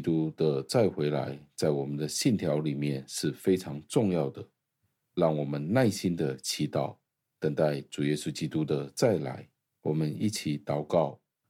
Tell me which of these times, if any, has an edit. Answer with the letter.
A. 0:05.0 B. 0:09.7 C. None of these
A